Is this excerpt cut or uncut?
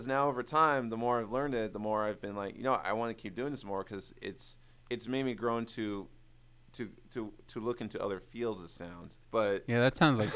cut